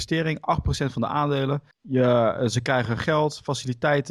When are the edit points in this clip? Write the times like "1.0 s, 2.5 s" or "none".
1.7 s

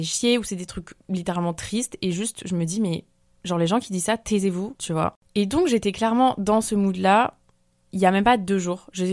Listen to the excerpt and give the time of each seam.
4.8 s

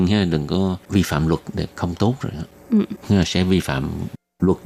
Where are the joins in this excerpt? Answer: 3.0 s

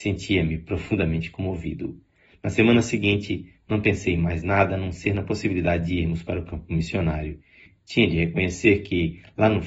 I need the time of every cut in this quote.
2.3 s

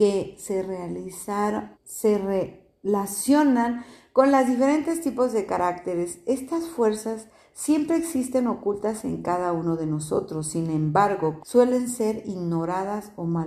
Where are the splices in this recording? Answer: 1.7 s, 11.4 s

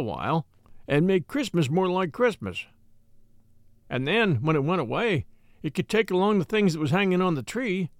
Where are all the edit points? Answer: none

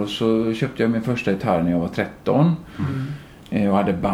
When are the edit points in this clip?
none

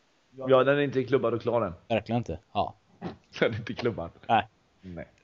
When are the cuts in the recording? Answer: 2.4 s

